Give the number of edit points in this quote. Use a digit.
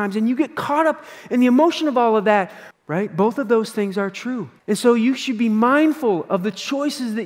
2